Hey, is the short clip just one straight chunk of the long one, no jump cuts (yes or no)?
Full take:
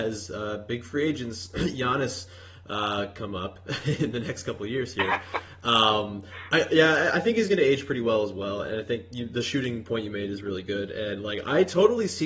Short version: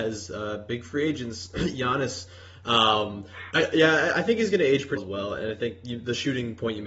no